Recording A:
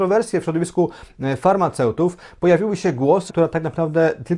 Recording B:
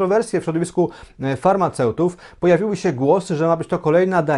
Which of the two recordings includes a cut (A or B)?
A